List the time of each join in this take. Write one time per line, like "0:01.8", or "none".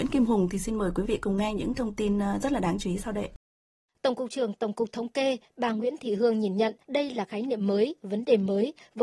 0:03.9
0:06.8